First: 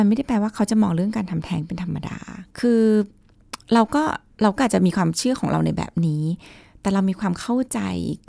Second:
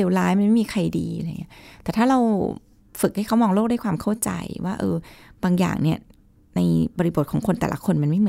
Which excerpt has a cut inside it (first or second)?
first